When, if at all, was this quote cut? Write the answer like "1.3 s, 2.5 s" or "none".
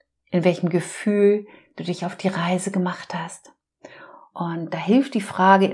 4.3 s